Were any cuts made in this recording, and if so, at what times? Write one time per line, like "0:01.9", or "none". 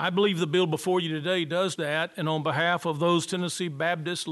0:01.8